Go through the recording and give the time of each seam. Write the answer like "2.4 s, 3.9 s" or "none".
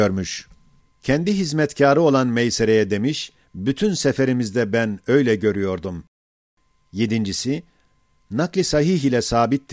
3.4 s